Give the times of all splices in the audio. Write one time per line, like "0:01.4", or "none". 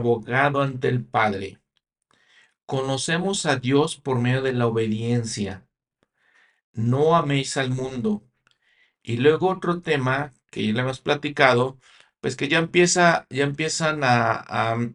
none